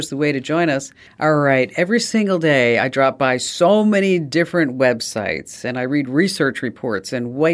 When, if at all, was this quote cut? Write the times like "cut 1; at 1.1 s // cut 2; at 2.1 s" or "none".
none